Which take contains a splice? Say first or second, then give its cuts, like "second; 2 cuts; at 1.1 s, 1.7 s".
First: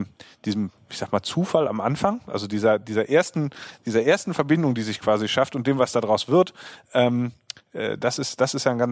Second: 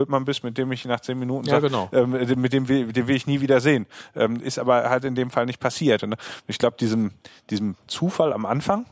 second; 2 cuts; at 6.0 s, 7.9 s